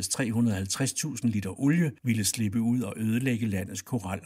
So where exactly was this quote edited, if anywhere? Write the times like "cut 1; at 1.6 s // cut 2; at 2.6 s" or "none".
cut 1; at 2.0 s